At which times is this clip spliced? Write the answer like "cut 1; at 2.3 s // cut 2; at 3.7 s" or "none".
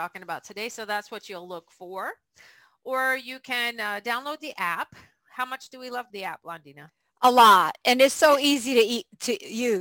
cut 1; at 6.1 s